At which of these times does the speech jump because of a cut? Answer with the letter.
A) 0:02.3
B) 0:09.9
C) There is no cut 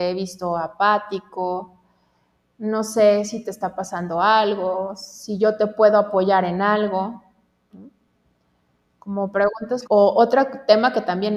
B